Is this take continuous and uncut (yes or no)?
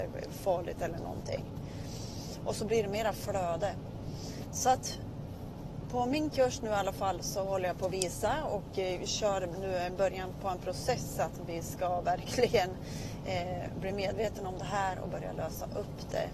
no